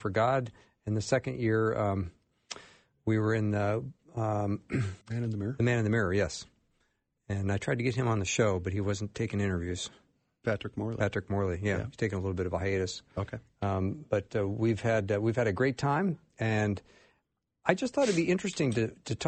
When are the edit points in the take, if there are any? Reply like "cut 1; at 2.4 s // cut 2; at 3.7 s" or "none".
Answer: cut 1; at 5.0 s